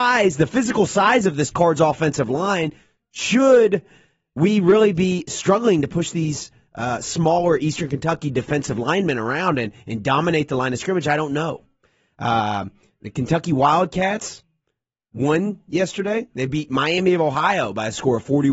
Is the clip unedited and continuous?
yes; 0 cuts

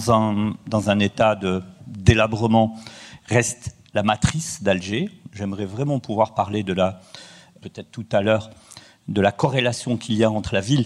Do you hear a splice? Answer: no; 0 cuts

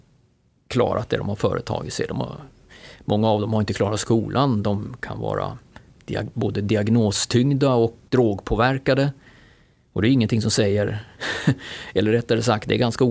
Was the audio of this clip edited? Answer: yes; 1 cut; at 8.1 s

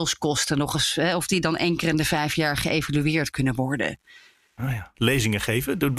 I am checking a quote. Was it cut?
yes; 1 cut; at 4.9 s

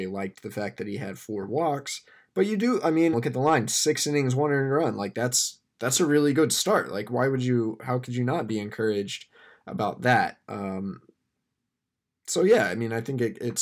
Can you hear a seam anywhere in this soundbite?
yes; 1 cut; at 3.1 s

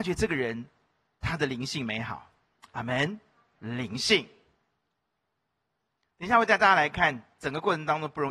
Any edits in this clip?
yes; 1 cut; at 3.6 s

